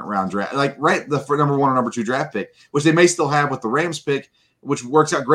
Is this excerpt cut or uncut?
uncut